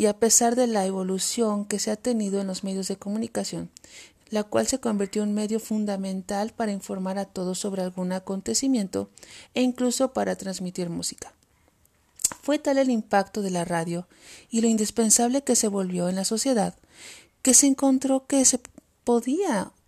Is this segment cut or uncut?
cut